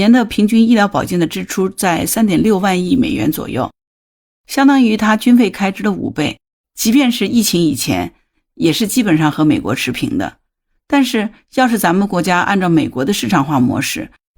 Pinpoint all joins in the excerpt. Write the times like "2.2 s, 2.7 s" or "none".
6.6 s